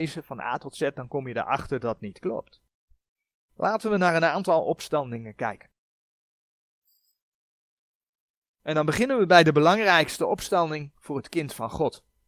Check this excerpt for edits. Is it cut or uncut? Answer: cut